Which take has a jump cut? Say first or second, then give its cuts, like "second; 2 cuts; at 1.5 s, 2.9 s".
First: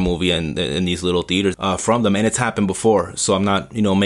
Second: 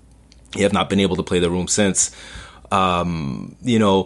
first; 1 cut; at 1.5 s